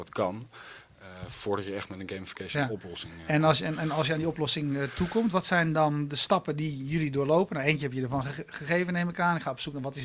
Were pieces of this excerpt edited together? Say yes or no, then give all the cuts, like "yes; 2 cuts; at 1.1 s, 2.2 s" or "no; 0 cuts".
no; 0 cuts